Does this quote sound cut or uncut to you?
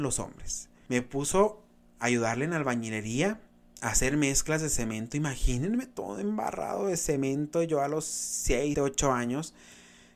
cut